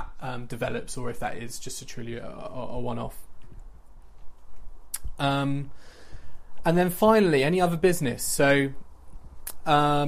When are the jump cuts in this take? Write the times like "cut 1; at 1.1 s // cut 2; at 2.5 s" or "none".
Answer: none